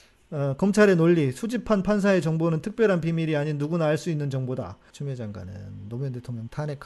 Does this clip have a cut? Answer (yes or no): yes